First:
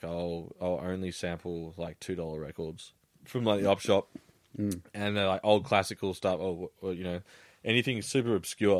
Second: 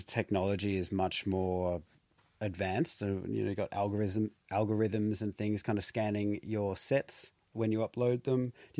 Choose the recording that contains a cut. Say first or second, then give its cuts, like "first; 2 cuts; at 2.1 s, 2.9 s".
first; 1 cut; at 3.1 s